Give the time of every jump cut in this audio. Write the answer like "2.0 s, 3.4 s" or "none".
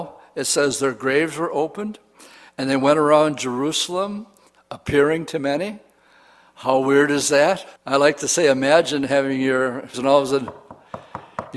7.8 s, 9.9 s

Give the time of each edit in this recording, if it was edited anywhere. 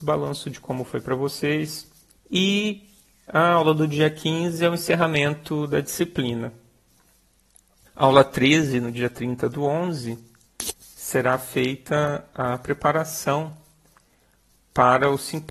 2.2 s, 7.9 s

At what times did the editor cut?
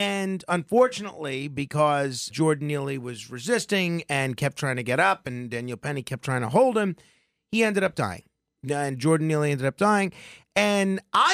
2.3 s

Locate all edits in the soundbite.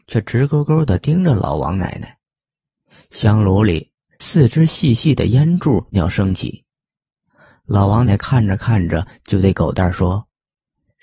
5.9 s, 8.1 s

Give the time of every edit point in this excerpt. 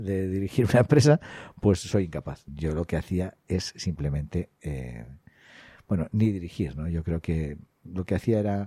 2.5 s

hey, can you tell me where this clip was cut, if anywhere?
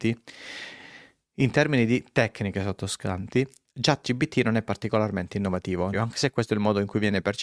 5.9 s

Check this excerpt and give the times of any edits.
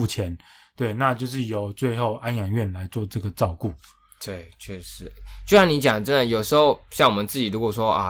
none

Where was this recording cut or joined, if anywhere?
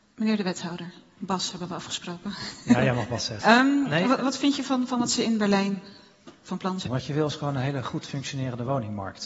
3.4 s, 6.9 s

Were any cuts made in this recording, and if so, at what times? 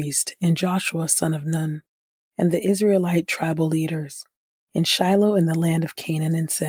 none

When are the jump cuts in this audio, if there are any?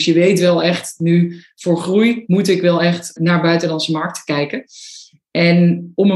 3.2 s

